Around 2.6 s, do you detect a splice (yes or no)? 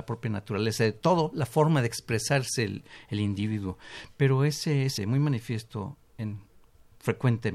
no